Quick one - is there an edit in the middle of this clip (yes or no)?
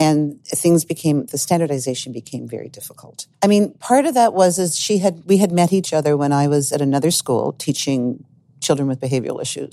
yes